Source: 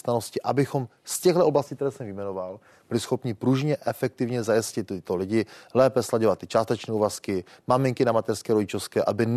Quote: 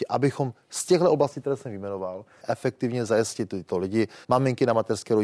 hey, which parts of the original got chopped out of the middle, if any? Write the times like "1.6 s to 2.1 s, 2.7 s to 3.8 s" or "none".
2.8 s to 3.8 s, 5.6 s to 7.6 s